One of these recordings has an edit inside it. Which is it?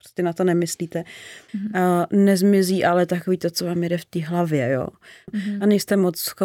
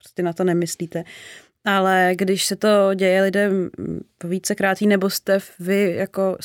first; 2 cuts; at 1.5 s, 5.3 s

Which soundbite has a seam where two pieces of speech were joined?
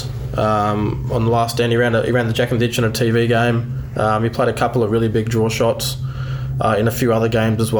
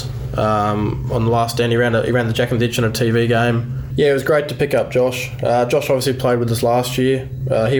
second; 1 cut; at 3.9 s

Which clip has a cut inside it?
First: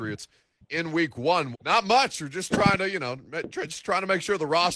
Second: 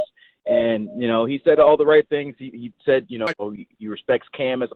first; 1 cut; at 1.5 s

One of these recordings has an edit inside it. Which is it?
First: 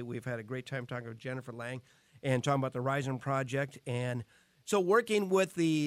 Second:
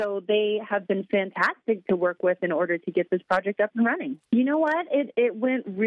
second; 1 cut; at 4.3 s

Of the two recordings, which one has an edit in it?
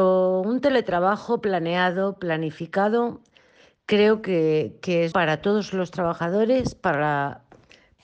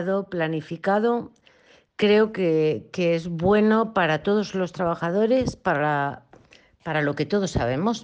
first; 1 cut; at 5.1 s

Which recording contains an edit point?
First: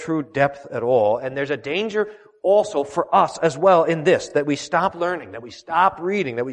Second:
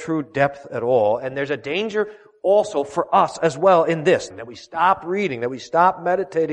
second; 1 cut; at 4.3 s

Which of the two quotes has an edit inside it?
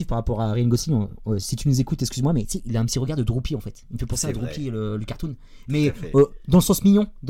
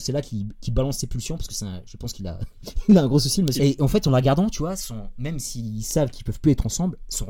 second; 2 cuts; at 3.6 s, 5.2 s

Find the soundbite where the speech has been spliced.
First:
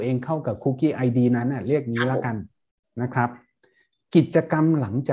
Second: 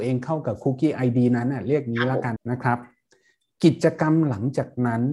second; 1 cut; at 2.4 s

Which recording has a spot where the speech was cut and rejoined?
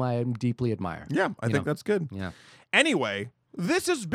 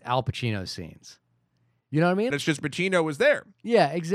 second; 1 cut; at 2.3 s

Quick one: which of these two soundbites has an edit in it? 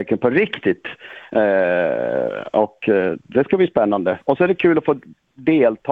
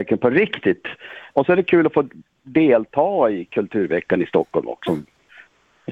second; 2 cuts; at 1.3 s, 4.9 s

